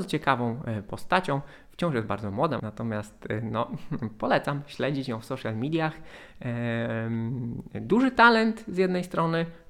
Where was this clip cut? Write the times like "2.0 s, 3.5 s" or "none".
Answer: 2.6 s